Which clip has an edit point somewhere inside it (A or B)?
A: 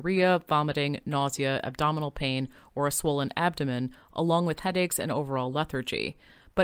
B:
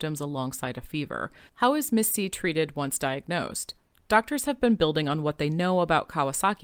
B